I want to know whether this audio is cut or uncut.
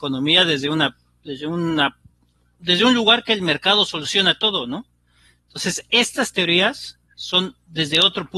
uncut